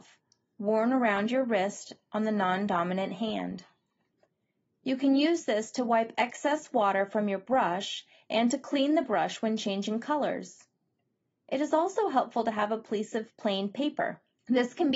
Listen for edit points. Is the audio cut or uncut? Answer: uncut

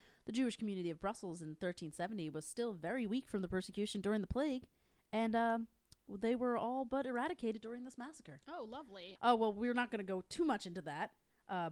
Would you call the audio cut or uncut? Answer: cut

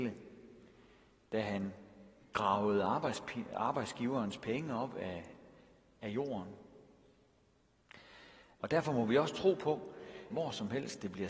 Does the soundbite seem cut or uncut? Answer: cut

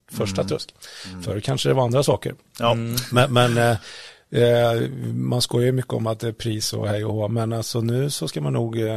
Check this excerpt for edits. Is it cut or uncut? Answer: uncut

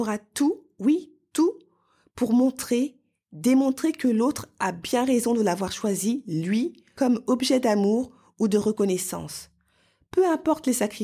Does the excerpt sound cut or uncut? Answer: uncut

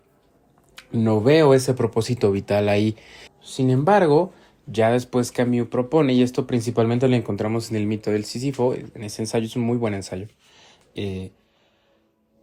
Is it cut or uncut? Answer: cut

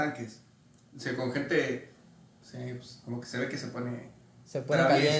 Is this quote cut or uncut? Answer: cut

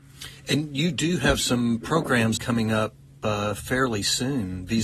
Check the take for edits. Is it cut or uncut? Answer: cut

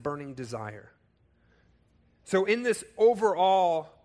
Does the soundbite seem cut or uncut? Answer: uncut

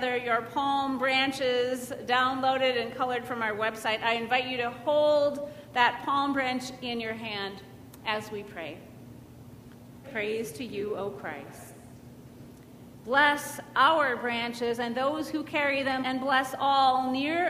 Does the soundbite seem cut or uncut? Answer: cut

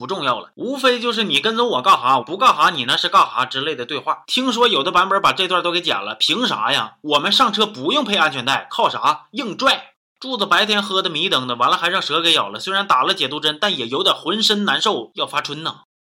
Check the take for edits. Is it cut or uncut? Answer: cut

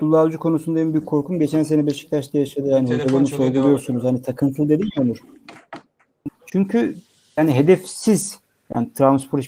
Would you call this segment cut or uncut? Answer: cut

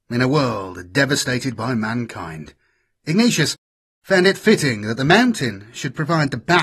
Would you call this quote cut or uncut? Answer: uncut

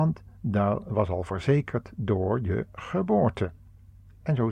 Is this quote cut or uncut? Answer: uncut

